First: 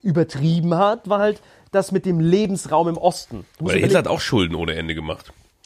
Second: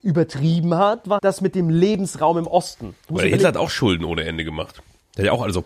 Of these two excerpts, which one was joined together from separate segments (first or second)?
second